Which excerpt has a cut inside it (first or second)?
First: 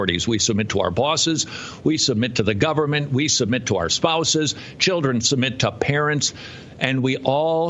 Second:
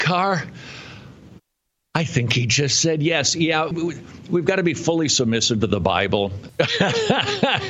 second